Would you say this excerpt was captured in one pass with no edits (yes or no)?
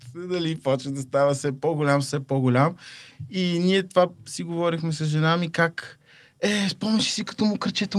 yes